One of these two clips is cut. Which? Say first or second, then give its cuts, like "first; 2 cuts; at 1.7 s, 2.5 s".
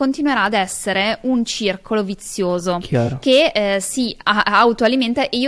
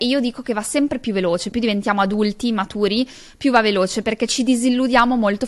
second; 1 cut; at 1.5 s